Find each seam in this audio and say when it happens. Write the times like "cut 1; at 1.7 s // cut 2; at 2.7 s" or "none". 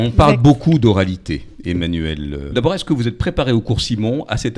cut 1; at 2.5 s